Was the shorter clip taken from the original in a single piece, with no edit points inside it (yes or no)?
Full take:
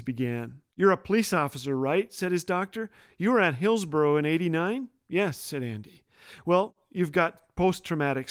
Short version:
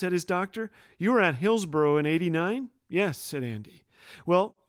yes